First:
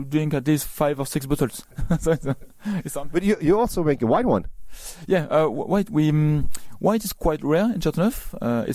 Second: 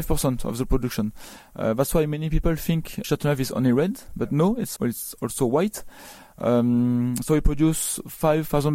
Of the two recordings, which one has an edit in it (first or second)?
second